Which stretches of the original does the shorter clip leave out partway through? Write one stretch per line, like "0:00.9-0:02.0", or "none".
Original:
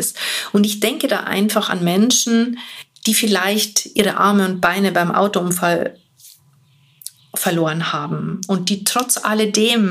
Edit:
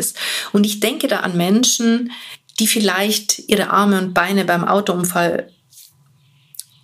0:01.2-0:01.7